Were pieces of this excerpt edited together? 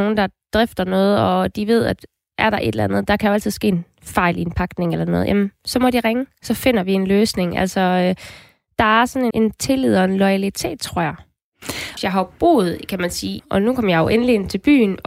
yes; 3 cuts; at 9.3 s, 12.0 s, 13.4 s

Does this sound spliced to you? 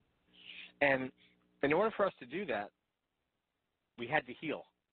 no; 0 cuts

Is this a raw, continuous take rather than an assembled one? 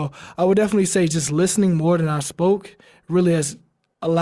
yes; 0 cuts

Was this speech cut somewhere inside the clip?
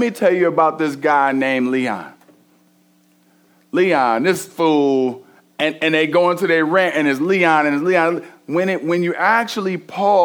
no; 0 cuts

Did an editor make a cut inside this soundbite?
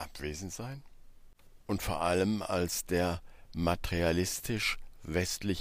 yes; 1 cut; at 1.6 s

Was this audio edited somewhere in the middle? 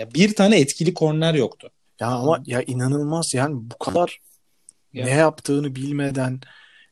yes; 1 cut; at 1.9 s

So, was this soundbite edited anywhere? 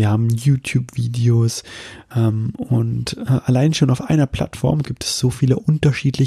yes; 2 cuts; at 2.1 s, 4.8 s

